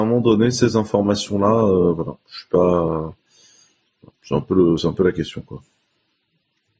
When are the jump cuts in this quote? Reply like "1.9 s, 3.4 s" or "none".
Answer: none

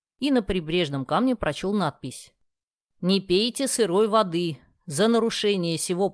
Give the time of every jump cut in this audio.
none

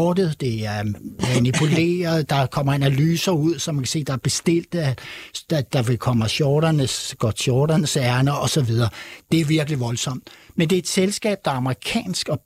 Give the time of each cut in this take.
10.5 s

